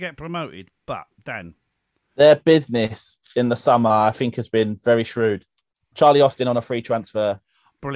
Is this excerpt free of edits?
yes; 0 cuts

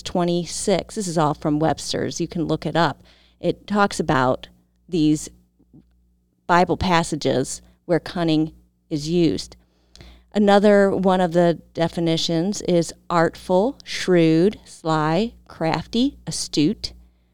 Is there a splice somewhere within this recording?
no; 0 cuts

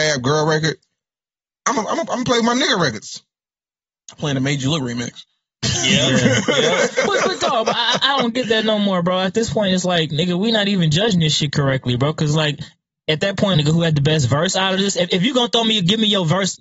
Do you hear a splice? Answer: yes; 1 cut; at 13.5 s

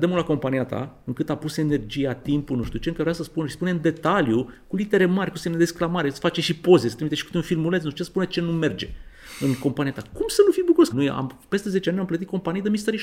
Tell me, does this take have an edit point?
yes; 1 cut; at 10.9 s

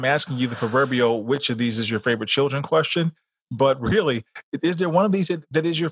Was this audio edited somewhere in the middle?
no; 0 cuts

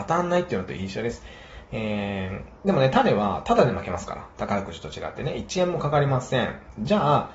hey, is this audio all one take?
yes; 0 cuts

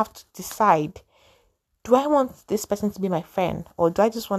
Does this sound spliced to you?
no; 0 cuts

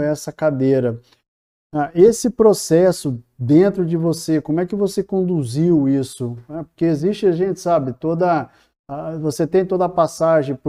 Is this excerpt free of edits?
yes; 0 cuts

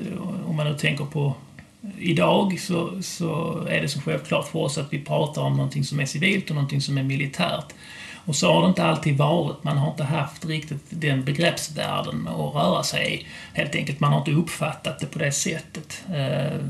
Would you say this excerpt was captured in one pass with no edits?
yes; 0 cuts

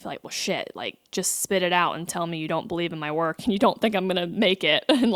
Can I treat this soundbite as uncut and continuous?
yes; 0 cuts

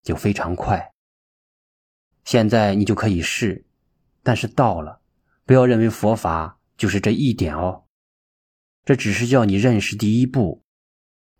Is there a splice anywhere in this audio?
yes; 2 cuts; at 2.1 s, 4.0 s

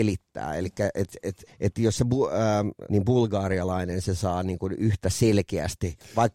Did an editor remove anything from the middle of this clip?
yes; 2 cuts; at 1.5 s, 2.9 s

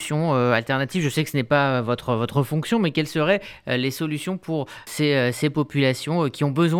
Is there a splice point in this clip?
yes; 1 cut; at 4.9 s

